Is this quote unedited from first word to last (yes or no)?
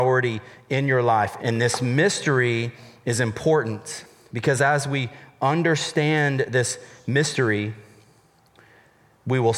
no